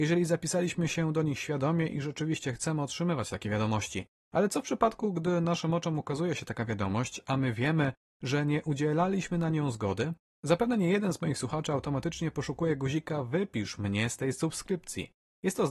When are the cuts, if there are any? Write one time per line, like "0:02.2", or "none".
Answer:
none